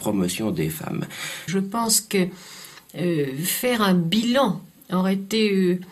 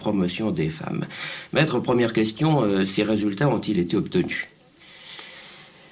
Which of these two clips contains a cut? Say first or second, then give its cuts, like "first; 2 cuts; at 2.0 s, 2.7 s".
first; 1 cut; at 1.5 s